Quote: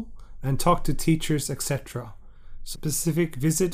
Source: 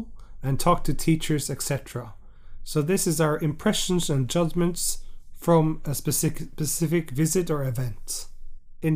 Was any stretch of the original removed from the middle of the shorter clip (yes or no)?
yes